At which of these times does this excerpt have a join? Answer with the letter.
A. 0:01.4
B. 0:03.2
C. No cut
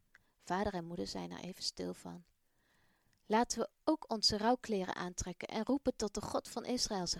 C